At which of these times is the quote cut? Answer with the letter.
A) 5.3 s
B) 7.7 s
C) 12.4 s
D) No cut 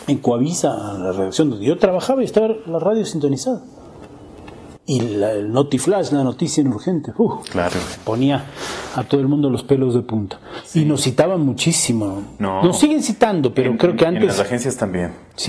B